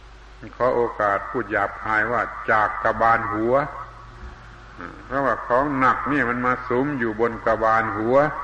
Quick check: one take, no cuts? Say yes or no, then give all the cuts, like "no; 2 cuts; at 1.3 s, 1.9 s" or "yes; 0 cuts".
yes; 0 cuts